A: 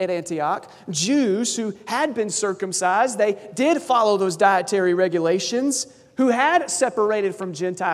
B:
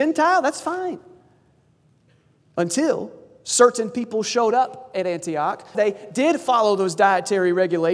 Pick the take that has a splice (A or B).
B